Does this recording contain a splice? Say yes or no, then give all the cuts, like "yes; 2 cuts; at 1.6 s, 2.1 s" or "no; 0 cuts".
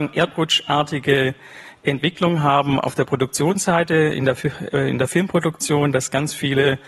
no; 0 cuts